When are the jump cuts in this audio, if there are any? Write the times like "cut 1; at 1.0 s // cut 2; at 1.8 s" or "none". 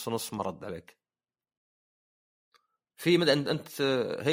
none